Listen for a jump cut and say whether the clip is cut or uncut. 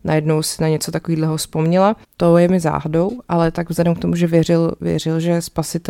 cut